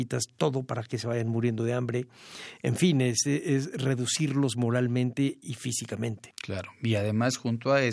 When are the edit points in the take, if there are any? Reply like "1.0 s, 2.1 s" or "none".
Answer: none